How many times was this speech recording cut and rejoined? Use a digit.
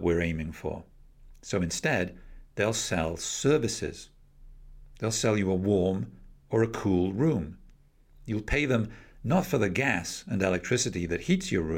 0